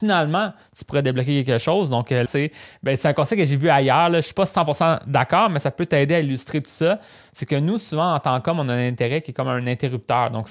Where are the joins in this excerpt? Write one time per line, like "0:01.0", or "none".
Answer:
0:02.3